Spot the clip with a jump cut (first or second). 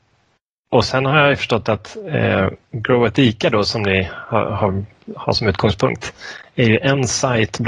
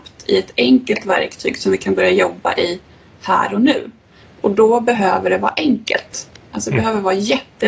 second